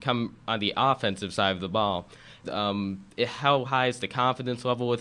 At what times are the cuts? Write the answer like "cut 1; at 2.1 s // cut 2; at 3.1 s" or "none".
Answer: cut 1; at 2.4 s